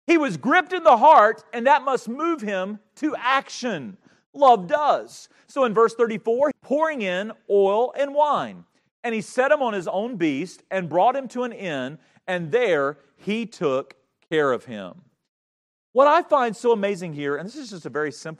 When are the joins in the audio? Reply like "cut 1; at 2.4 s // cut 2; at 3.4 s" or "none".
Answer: cut 1; at 6.5 s